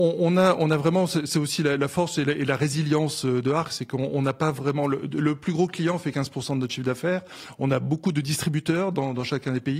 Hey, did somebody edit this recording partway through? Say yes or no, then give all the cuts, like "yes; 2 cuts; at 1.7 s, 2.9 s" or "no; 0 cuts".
no; 0 cuts